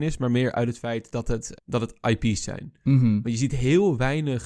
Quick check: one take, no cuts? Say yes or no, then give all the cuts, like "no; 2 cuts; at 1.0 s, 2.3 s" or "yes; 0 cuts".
no; 1 cut; at 1.5 s